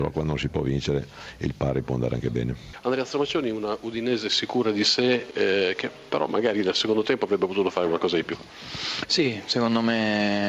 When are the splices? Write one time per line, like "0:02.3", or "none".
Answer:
none